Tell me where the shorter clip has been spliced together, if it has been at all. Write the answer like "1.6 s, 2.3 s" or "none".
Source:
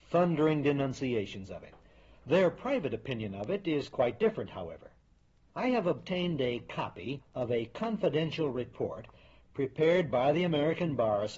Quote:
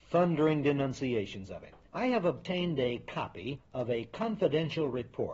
1.8 s

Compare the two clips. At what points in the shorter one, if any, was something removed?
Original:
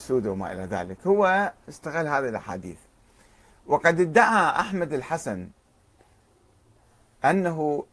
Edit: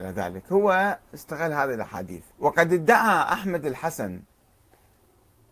2.3 s

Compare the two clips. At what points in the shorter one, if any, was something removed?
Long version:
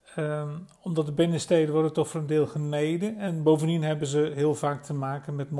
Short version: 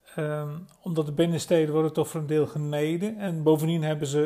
none

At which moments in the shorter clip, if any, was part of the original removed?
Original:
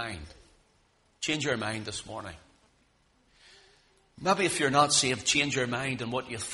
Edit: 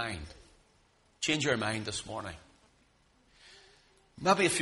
none

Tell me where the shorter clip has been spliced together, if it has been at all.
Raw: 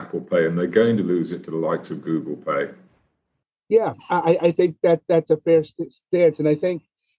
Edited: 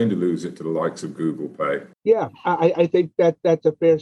1.9 s

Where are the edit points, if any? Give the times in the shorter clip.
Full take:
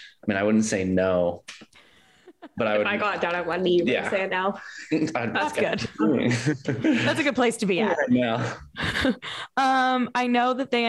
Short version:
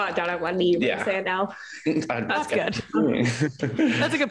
none

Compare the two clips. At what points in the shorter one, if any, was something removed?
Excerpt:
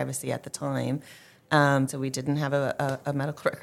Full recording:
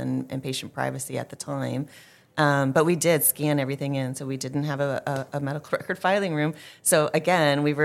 1.9 s

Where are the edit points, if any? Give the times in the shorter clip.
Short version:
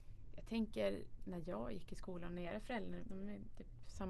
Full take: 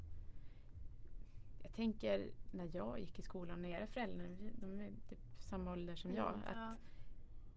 3.0 s

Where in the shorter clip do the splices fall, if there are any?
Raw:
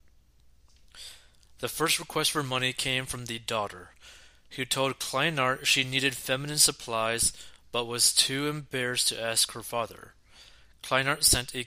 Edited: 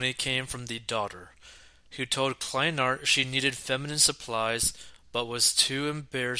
none

